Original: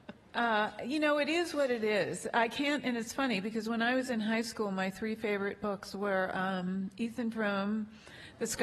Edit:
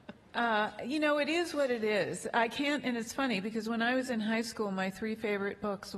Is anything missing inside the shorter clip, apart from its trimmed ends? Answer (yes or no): no